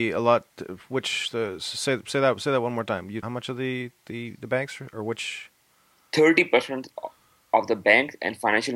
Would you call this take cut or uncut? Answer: cut